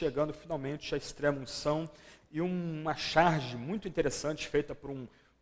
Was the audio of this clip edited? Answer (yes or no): yes